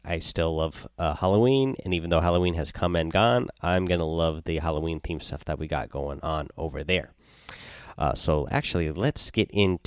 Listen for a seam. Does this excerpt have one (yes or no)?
no